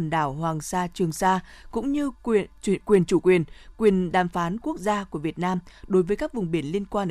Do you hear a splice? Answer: no; 0 cuts

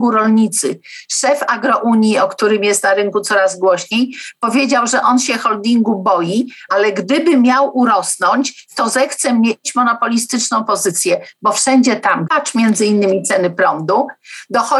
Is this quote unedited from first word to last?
no; 2 cuts; at 6.7 s, 12.3 s

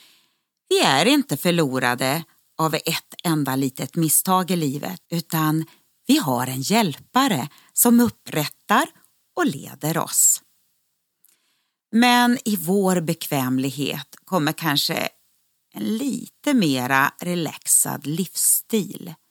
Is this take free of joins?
no; 1 cut; at 5.0 s

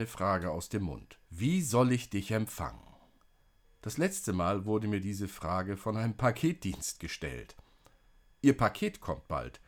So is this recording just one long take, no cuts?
no; 2 cuts; at 1.2 s, 3.6 s

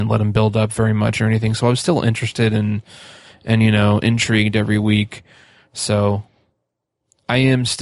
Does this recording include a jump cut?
no; 0 cuts

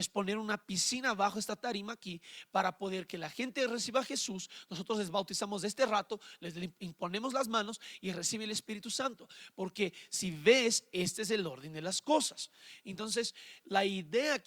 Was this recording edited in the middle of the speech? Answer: no; 0 cuts

